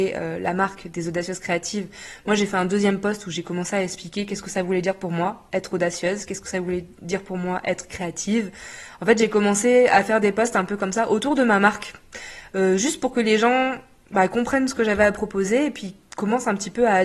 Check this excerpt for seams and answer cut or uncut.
uncut